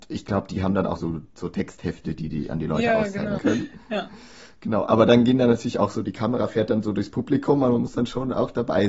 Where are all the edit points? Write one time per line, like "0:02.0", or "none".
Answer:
0:01.0
0:03.4